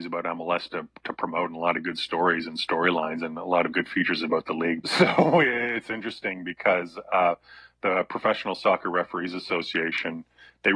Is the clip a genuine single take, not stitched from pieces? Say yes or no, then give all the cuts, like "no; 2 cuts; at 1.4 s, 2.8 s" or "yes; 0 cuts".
no; 1 cut; at 4.8 s